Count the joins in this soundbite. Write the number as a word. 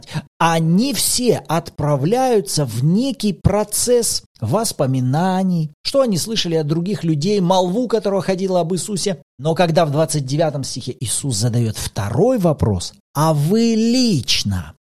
one